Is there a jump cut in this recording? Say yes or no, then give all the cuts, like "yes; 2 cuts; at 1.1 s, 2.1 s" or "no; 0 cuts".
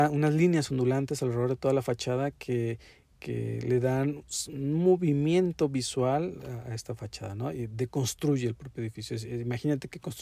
no; 0 cuts